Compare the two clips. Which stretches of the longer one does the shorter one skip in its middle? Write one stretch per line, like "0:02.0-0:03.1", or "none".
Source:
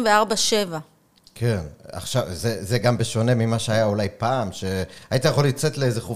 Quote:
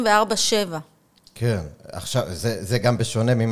none